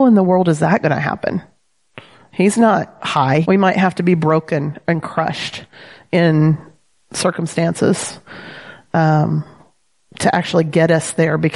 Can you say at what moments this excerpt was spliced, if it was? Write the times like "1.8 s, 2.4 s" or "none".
3.4 s